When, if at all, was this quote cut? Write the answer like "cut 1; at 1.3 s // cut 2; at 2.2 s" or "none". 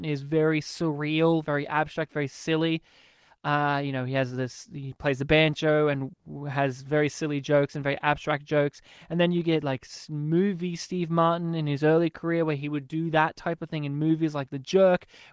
none